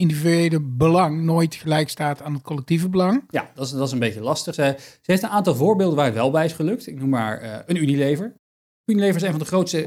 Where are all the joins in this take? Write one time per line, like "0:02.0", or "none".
none